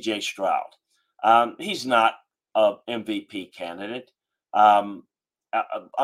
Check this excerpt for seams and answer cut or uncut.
uncut